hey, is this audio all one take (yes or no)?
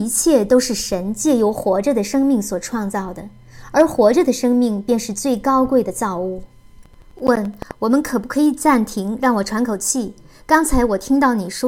yes